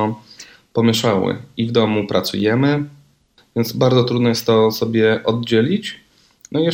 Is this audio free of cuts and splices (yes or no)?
no